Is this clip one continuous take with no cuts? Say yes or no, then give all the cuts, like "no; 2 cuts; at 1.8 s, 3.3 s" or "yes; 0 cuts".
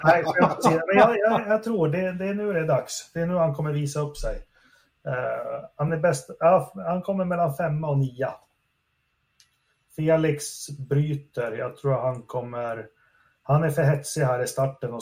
yes; 0 cuts